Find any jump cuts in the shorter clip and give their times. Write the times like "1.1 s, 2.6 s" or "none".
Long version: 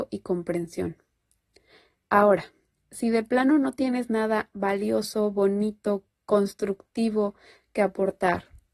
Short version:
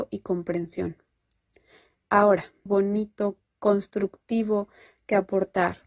2.7 s